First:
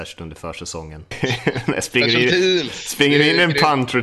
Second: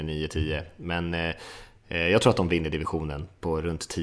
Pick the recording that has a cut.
first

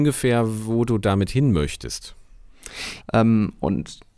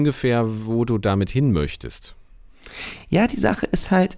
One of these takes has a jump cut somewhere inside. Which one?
first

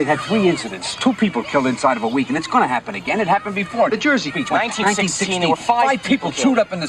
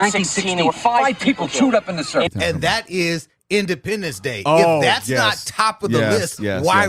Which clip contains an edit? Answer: second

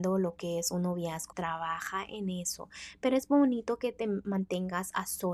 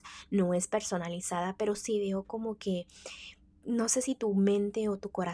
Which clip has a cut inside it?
first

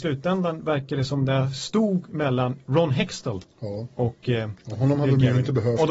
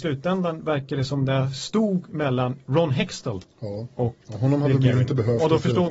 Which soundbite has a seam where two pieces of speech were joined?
second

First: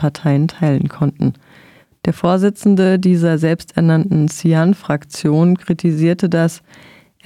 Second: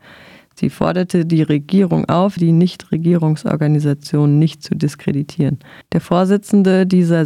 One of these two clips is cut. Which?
second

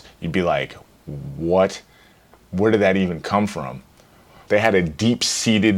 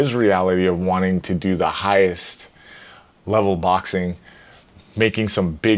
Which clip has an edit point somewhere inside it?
first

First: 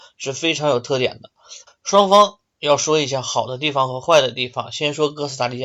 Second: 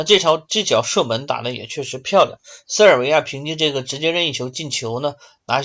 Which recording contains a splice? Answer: first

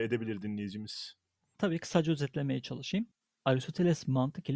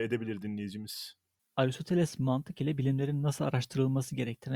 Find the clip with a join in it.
second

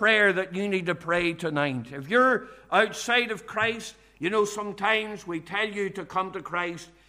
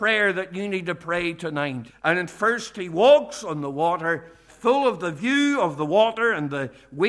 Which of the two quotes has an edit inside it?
second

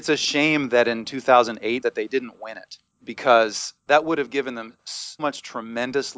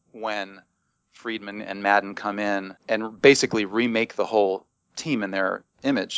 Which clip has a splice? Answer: first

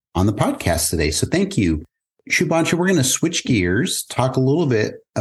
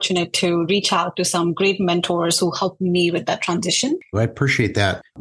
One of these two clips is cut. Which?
second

